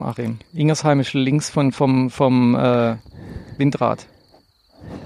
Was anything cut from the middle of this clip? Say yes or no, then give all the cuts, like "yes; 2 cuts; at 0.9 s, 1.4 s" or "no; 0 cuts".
no; 0 cuts